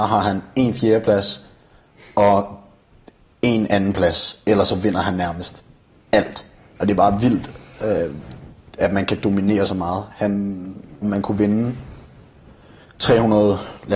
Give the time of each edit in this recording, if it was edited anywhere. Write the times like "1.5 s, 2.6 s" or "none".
6.7 s, 11.0 s